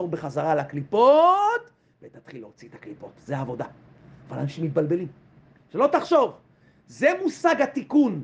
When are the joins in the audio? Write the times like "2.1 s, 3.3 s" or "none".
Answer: 5.6 s